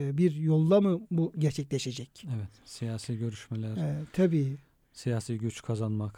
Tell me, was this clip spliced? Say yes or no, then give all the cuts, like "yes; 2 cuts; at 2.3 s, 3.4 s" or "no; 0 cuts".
no; 0 cuts